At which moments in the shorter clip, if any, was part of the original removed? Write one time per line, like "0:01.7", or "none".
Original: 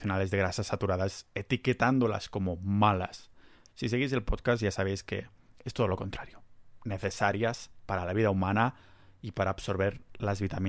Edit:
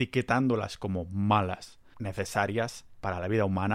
0:01.9